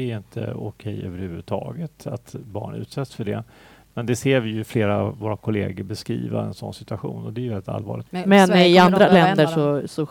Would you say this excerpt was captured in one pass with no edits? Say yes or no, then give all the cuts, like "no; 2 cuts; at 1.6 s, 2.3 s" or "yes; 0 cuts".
no; 1 cut; at 8.1 s